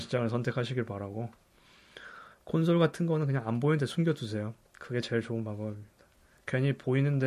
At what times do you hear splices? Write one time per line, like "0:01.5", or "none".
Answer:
none